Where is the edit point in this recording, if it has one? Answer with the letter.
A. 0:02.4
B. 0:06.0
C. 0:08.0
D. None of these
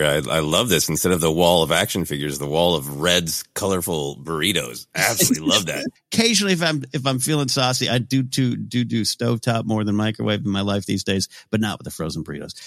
B